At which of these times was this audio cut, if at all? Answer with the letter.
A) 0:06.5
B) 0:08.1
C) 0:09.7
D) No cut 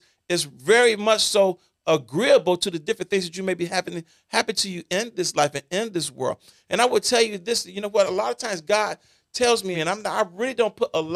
C